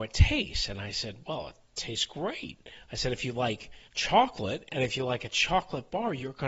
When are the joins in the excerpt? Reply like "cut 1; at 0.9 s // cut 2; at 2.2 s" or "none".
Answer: cut 1; at 3.9 s